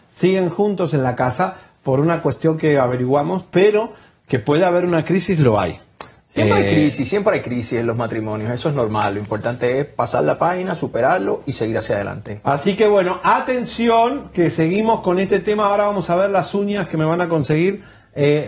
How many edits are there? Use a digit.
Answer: 0